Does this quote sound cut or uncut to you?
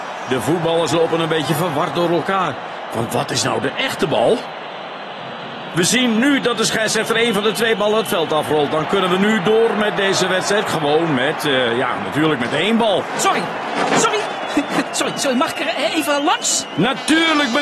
uncut